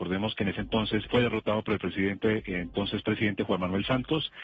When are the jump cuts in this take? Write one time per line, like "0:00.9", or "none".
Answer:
0:01.0